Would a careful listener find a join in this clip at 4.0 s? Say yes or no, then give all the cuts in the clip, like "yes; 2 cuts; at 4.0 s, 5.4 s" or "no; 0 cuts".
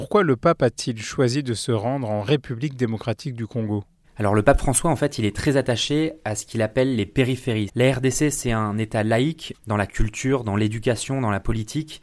no; 2 cuts; at 7.7 s, 9.5 s